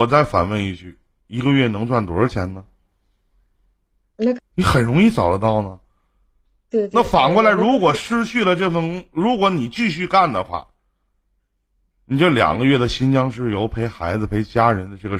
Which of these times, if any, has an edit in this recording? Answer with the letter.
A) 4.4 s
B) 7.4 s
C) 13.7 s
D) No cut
A